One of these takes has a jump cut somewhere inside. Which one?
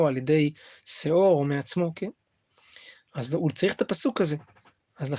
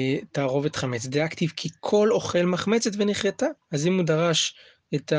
second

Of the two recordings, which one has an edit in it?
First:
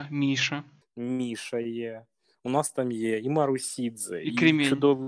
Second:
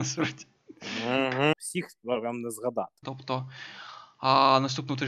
second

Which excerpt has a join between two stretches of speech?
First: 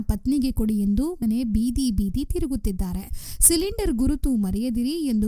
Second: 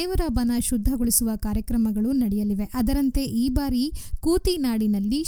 first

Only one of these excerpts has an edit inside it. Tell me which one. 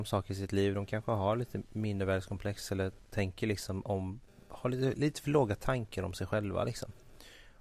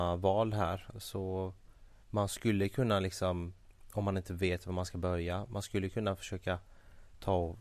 second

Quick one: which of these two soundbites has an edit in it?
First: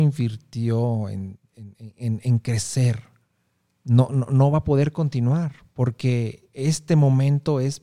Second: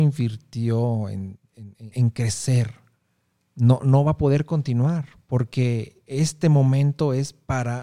second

